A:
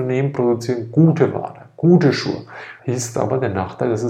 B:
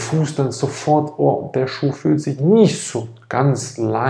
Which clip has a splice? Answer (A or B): A